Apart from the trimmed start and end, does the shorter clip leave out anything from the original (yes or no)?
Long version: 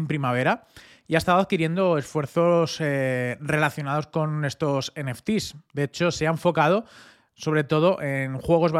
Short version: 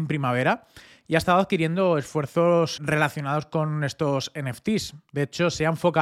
yes